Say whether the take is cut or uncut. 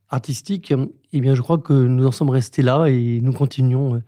uncut